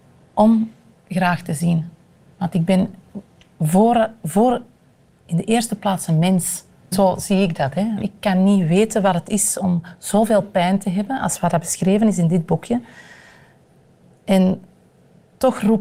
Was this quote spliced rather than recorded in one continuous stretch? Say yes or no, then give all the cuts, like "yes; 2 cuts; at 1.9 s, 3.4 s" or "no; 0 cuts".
yes; 2 cuts; at 6.9 s, 8.0 s